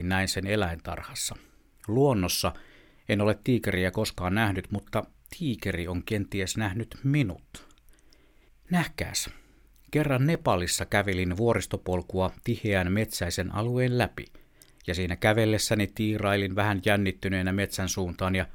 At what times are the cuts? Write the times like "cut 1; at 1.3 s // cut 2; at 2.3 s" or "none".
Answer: none